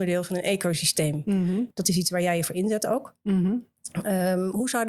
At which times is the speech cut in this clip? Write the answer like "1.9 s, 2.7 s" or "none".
1.7 s